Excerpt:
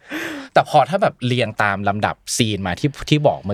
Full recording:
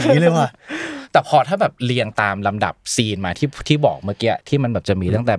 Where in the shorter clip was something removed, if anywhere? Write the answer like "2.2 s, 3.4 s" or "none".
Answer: none